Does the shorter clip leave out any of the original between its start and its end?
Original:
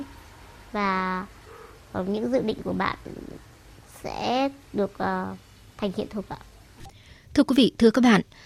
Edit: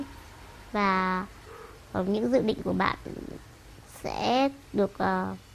no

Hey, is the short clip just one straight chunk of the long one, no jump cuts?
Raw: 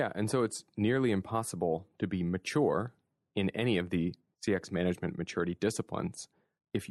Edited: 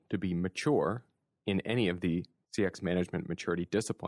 yes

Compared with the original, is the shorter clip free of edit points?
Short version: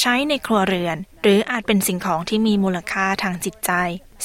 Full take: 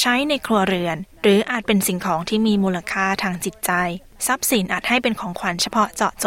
yes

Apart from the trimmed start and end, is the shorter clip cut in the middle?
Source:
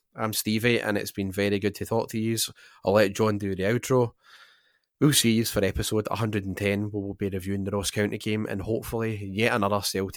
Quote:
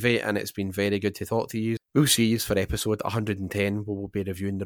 yes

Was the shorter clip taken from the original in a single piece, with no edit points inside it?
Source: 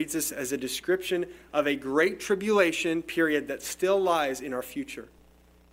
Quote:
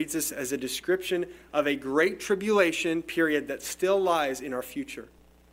yes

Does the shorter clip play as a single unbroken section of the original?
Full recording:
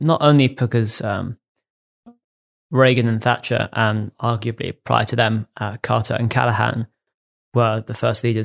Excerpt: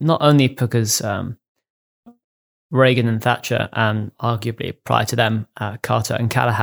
yes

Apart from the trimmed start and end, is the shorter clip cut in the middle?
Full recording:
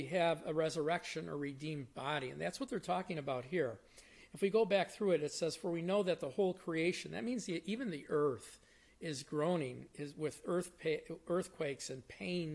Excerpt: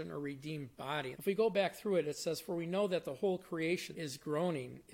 yes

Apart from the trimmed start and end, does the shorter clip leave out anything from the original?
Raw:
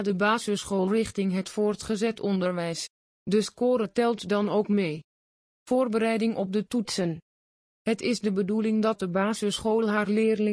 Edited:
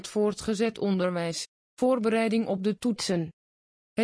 yes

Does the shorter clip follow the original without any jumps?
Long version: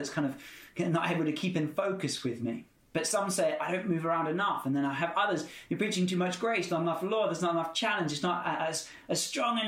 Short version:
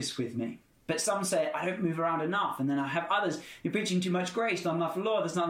yes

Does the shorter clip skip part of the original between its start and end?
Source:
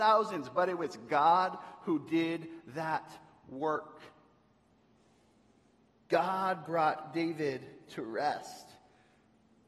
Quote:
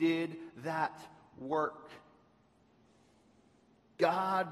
no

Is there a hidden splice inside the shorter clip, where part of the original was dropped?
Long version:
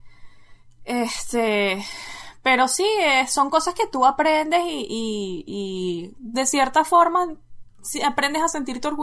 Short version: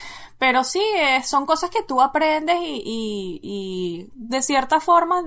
no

